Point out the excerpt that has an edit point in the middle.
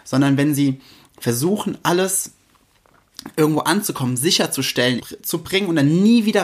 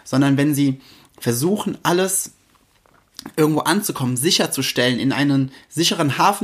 first; 1 cut; at 5.0 s

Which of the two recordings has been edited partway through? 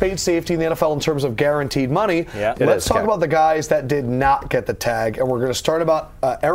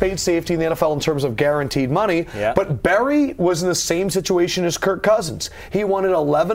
first; 1 cut; at 2.5 s

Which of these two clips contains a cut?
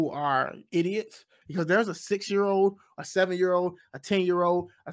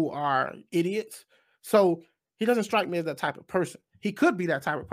first; 1 cut; at 1.4 s

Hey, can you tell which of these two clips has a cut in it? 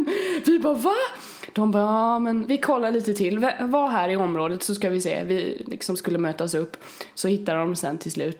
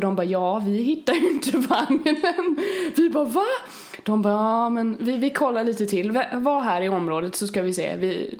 first; 1 cut; at 2.5 s

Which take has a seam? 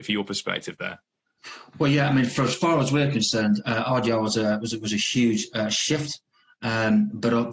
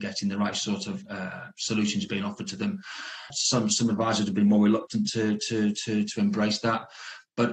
second; 1 cut; at 3.3 s

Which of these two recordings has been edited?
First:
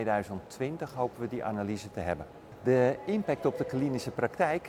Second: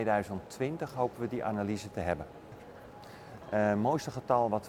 second; 1 cut; at 2.6 s

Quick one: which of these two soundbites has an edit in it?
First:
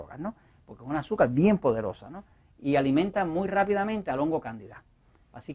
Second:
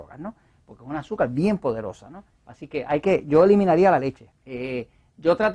second; 2 cuts; at 2.3 s, 4.3 s

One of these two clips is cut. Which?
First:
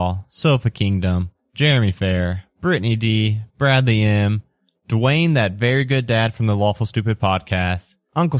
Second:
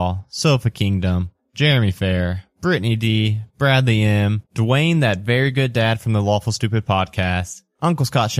second; 1 cut; at 4.4 s

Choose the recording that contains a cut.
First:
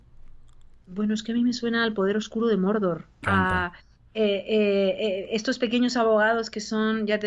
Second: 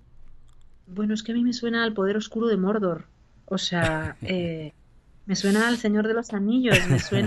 first; 1 cut; at 3.2 s

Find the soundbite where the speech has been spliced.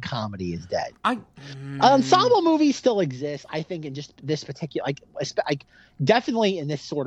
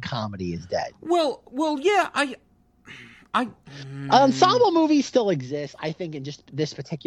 first; 1 cut; at 0.9 s

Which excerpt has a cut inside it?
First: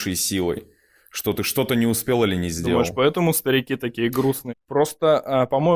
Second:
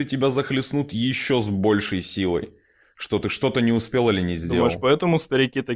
first; 1 cut; at 4.5 s

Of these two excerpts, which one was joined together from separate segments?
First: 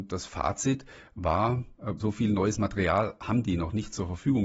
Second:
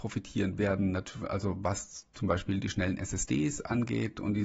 first; 1 cut; at 2.0 s

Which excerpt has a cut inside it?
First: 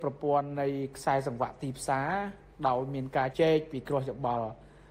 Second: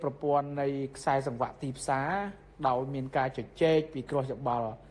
first; 1 cut; at 3.3 s

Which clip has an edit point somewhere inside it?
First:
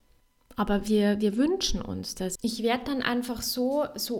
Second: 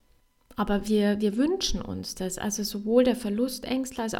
first; 1 cut; at 2.4 s

